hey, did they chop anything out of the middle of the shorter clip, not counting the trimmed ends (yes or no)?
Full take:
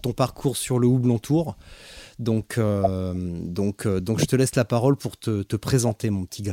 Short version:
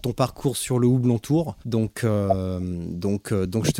yes